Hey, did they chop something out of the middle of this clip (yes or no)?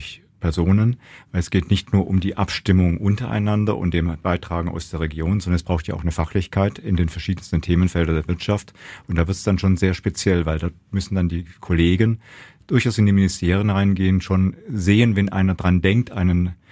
no